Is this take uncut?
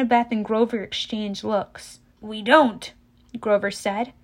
no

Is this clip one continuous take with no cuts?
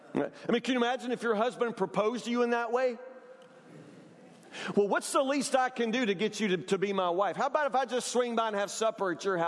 yes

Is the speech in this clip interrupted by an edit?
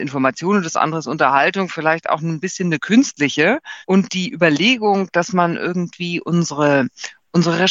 yes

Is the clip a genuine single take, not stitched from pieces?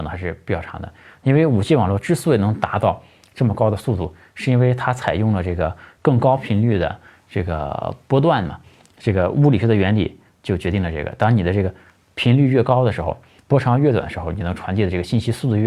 yes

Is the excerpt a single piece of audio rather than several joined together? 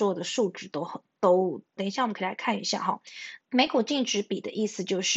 no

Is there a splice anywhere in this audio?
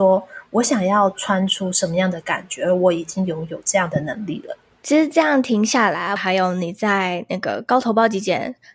yes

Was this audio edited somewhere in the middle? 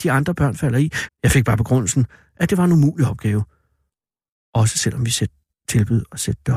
yes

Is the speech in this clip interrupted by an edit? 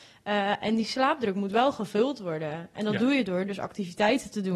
no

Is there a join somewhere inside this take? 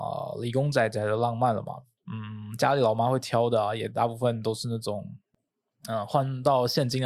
yes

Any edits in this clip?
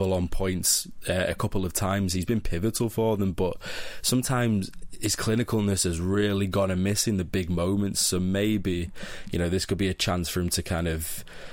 no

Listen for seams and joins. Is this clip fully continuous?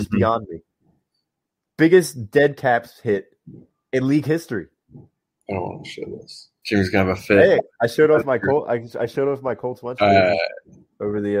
no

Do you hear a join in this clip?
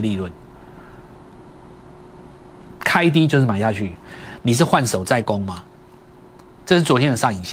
yes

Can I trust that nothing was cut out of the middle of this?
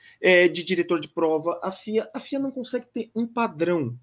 yes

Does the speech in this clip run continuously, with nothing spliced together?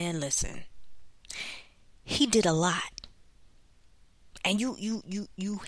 yes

